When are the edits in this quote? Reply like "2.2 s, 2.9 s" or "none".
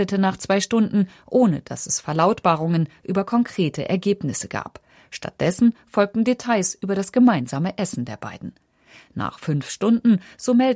none